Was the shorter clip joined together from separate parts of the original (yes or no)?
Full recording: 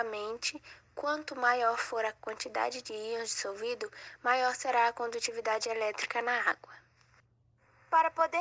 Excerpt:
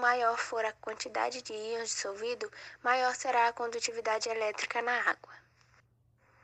no